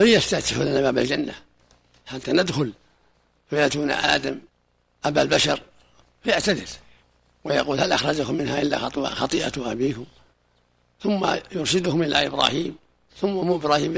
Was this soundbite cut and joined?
no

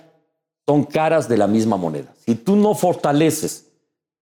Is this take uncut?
yes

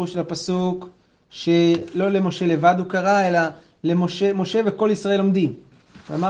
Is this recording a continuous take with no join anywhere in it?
yes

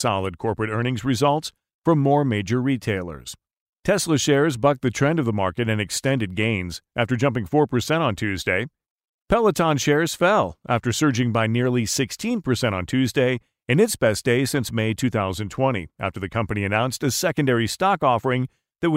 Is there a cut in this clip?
yes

